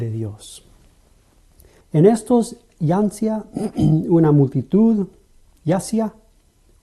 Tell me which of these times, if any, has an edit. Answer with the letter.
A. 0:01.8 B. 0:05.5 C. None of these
A